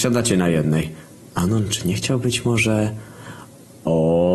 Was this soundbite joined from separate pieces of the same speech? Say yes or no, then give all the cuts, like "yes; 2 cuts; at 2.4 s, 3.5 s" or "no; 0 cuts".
no; 0 cuts